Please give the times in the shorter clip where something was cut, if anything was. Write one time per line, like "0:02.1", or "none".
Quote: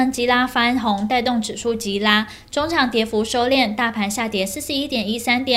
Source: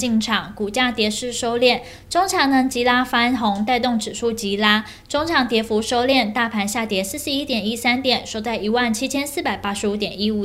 none